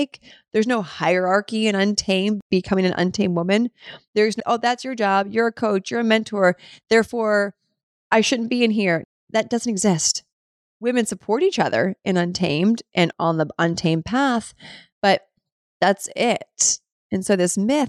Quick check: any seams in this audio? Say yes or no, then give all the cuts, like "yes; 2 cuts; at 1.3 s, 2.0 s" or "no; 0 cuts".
yes; 1 cut; at 4.4 s